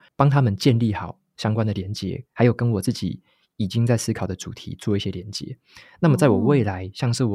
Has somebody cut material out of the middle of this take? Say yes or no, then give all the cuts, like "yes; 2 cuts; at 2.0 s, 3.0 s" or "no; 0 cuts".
no; 0 cuts